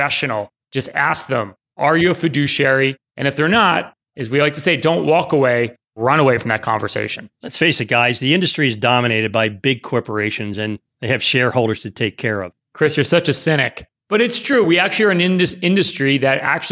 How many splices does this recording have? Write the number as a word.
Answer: one